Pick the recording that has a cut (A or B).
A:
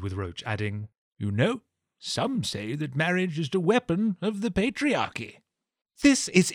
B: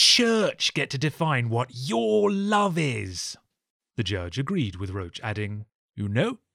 A